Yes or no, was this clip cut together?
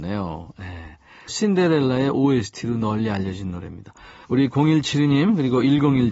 yes